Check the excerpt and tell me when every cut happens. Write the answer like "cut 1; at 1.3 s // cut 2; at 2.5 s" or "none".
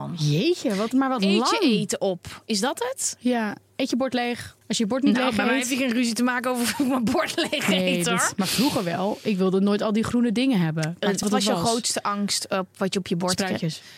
cut 1; at 4.6 s // cut 2; at 11.2 s